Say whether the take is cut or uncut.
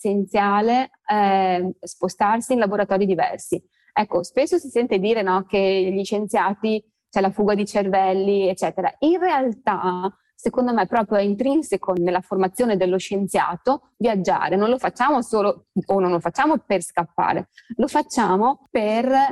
uncut